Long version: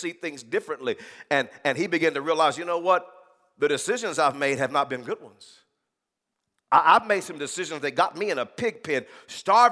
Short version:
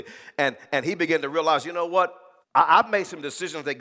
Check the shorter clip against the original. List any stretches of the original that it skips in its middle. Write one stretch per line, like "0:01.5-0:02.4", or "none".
0:03.3-0:06.6